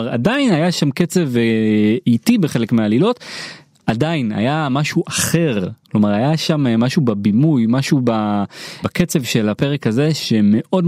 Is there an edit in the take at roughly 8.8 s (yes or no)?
yes